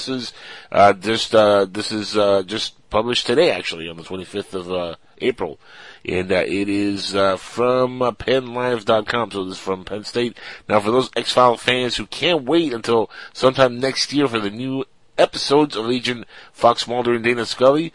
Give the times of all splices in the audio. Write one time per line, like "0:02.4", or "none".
none